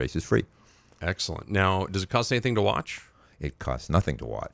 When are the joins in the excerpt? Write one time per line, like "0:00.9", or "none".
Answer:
none